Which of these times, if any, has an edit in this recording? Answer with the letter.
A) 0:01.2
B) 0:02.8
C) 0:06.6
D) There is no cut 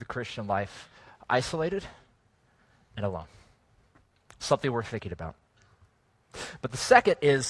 D